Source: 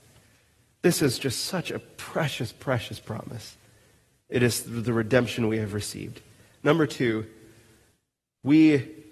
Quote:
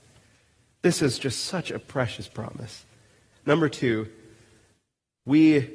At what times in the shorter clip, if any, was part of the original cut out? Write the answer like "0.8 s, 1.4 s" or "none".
1.8 s, 3.3 s